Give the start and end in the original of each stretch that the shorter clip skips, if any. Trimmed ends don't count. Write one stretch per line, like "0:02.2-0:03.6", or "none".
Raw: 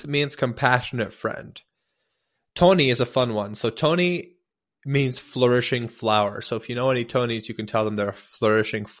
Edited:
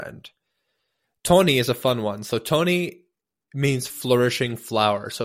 none